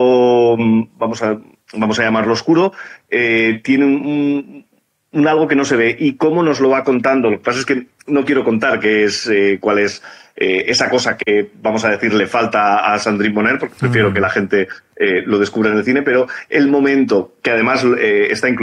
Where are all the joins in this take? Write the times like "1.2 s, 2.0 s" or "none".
none